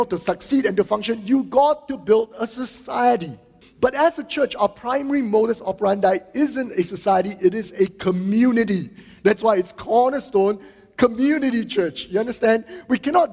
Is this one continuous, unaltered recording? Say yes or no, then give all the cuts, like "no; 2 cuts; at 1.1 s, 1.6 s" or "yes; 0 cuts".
no; 1 cut; at 3.6 s